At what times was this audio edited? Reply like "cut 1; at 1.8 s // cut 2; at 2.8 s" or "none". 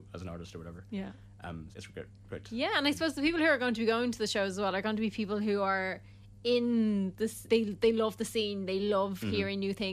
cut 1; at 1.7 s // cut 2; at 7.5 s